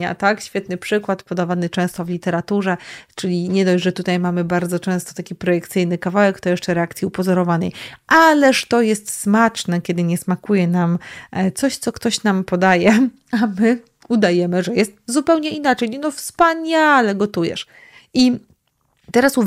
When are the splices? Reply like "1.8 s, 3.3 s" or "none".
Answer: none